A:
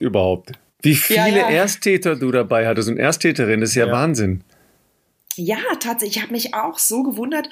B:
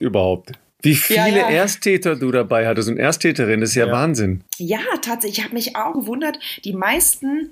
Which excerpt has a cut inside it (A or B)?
B